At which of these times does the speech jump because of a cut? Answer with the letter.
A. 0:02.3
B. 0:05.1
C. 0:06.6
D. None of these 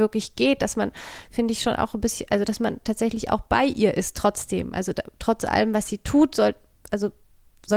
D